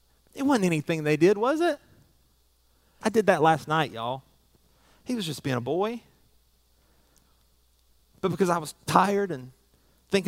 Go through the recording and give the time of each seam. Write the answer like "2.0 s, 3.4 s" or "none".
3.0 s